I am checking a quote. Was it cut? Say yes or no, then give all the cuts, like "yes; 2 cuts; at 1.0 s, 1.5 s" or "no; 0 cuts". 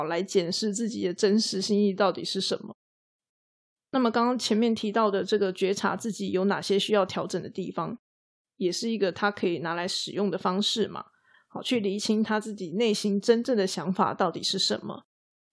yes; 1 cut; at 11.3 s